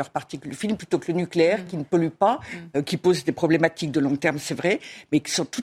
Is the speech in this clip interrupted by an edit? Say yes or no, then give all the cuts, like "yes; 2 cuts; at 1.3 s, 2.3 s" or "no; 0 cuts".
no; 0 cuts